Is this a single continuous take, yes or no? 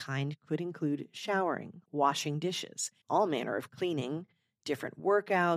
no